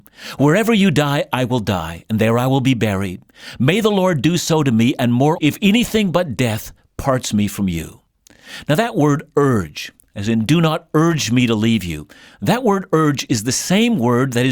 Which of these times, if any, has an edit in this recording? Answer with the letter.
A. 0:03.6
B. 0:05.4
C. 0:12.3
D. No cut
B